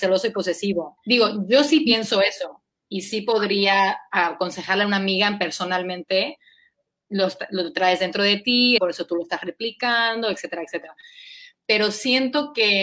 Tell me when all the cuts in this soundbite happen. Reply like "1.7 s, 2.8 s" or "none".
1.0 s, 8.8 s